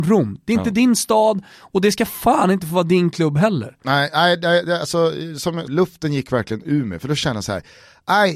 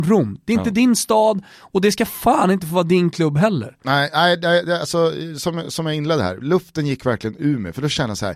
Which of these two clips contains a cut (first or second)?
first